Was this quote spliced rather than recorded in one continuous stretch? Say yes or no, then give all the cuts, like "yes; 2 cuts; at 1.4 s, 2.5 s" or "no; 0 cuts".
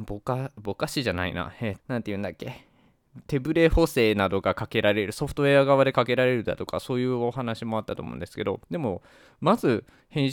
yes; 2 cuts; at 1.8 s, 8.6 s